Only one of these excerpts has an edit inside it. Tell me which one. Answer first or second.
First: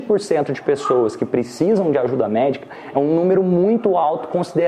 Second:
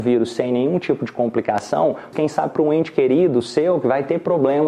second